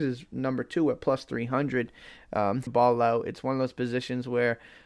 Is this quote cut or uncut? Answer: cut